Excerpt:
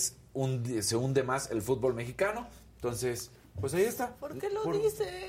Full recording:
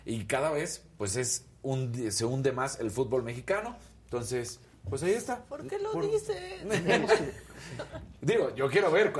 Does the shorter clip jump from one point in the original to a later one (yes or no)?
no